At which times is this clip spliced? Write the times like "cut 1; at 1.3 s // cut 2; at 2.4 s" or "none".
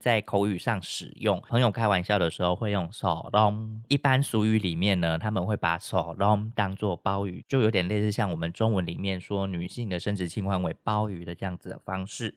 none